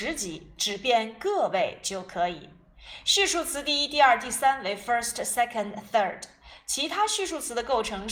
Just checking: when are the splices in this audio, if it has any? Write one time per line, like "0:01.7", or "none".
none